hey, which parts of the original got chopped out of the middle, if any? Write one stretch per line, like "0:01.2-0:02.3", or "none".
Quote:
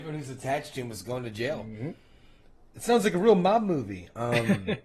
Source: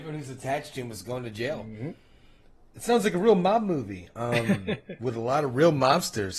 none